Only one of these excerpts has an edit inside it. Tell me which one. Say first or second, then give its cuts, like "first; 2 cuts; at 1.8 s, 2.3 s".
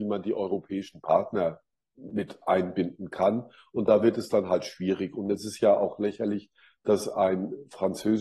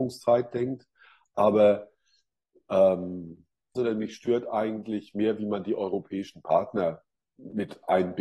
second; 1 cut; at 3.7 s